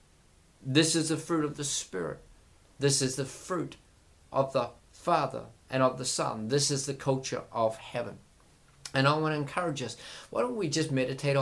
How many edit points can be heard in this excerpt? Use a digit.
1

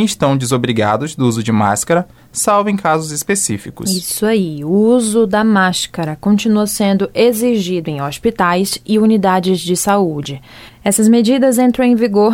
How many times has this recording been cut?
1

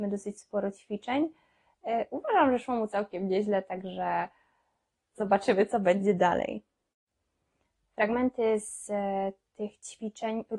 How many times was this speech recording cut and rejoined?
0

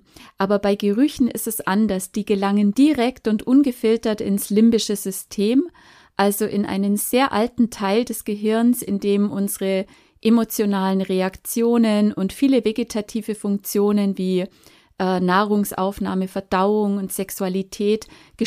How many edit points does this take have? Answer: 0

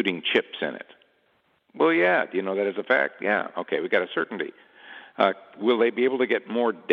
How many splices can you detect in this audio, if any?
0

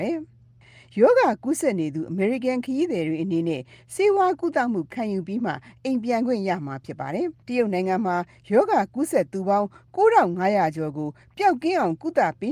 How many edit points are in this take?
1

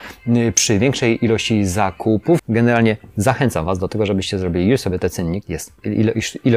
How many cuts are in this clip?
2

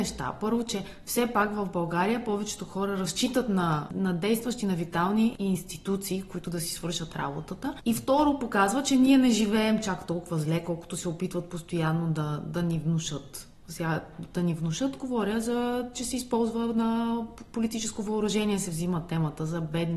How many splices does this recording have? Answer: 0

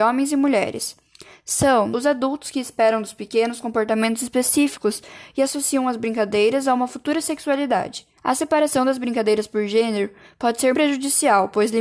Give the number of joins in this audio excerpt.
3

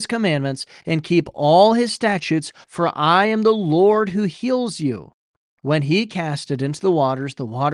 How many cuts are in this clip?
2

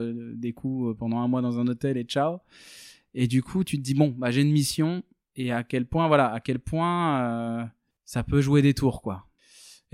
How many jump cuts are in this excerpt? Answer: 0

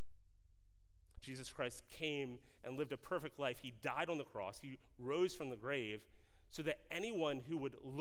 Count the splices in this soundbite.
1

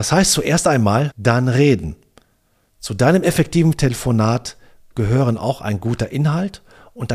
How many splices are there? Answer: 1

